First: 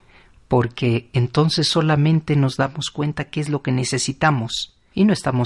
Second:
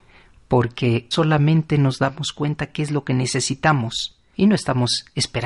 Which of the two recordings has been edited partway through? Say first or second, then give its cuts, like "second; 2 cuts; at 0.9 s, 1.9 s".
second; 1 cut; at 1.1 s